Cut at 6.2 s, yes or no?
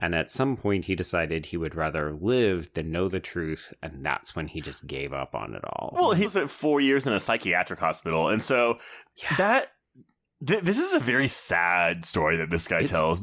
yes